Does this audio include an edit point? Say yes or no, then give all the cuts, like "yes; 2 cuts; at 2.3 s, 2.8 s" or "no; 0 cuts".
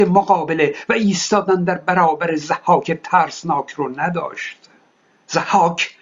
no; 0 cuts